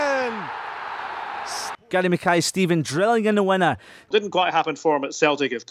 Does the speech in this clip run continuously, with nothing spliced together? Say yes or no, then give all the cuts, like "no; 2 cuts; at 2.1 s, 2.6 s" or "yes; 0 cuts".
no; 2 cuts; at 1.7 s, 4.1 s